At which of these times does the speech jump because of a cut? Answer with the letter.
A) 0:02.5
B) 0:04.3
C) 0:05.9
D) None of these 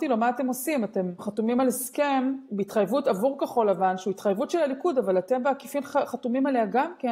D